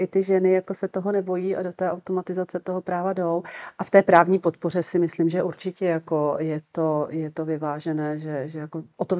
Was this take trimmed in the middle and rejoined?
no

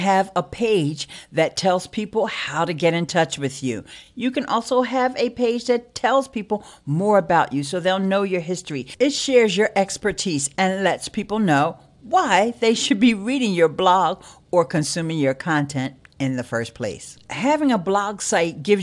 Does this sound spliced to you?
no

